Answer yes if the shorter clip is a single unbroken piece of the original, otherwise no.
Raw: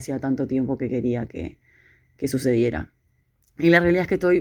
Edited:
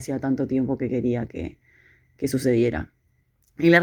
yes